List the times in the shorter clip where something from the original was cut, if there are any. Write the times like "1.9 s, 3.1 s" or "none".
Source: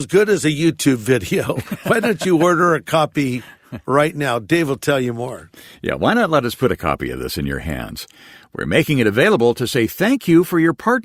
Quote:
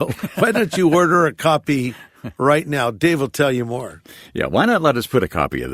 none